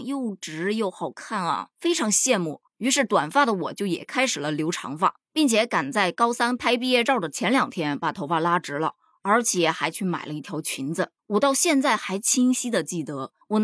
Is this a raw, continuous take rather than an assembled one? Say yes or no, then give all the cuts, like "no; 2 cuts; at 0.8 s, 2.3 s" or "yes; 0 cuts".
yes; 0 cuts